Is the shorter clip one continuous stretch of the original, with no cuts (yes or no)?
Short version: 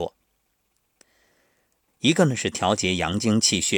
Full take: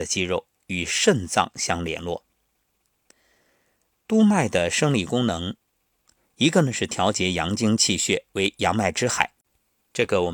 no